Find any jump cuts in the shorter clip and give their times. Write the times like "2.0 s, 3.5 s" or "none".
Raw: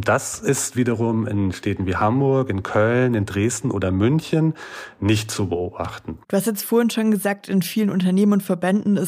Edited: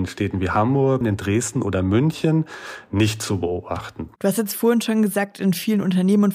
1.0 s